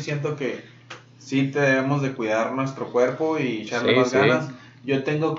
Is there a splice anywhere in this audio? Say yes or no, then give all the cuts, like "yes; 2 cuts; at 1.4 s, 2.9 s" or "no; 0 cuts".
no; 0 cuts